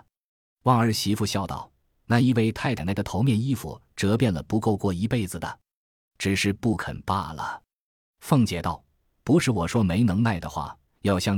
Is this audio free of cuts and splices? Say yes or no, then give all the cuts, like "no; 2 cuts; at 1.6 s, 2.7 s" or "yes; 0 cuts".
no; 1 cut; at 2.8 s